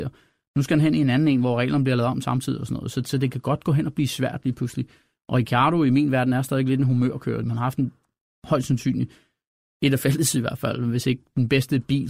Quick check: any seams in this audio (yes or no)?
yes